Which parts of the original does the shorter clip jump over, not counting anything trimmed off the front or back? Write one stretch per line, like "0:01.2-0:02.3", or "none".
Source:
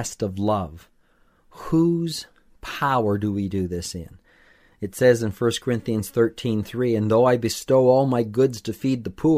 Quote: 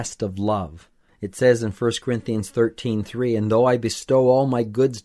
0:01.1-0:04.7